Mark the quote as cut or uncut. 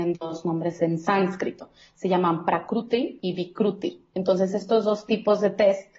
uncut